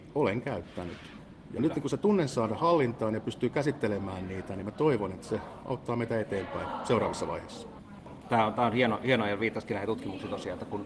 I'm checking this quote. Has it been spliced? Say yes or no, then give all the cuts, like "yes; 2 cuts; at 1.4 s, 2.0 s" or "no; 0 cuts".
yes; 2 cuts; at 1.6 s, 8.2 s